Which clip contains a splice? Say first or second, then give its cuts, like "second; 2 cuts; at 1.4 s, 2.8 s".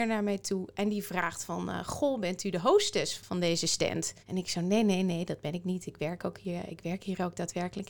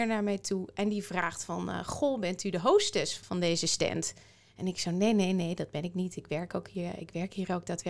first; 1 cut; at 4.2 s